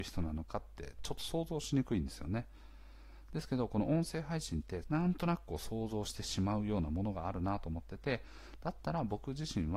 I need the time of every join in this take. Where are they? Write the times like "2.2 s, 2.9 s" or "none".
4.8 s